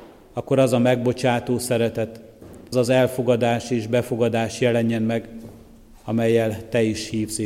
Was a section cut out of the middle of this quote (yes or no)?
yes